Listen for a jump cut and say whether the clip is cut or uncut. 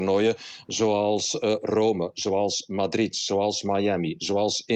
uncut